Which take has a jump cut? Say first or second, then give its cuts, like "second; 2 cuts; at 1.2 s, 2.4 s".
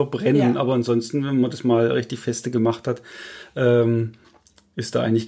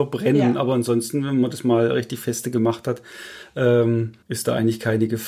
second; 1 cut; at 4.2 s